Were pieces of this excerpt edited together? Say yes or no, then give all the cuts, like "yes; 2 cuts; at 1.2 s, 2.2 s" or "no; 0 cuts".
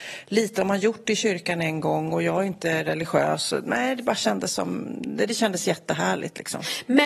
no; 0 cuts